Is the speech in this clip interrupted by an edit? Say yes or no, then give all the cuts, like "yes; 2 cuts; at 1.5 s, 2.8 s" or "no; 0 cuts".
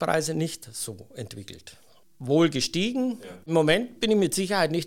yes; 1 cut; at 3.4 s